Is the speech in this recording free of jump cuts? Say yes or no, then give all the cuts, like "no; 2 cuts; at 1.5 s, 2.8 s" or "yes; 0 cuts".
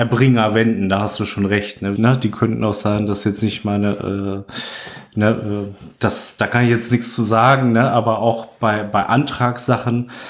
no; 1 cut; at 2.0 s